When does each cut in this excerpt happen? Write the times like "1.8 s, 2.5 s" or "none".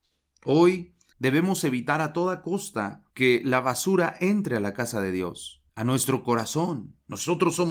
1.1 s, 3.1 s, 5.7 s